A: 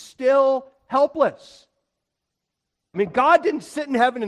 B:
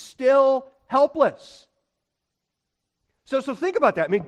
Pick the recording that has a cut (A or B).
A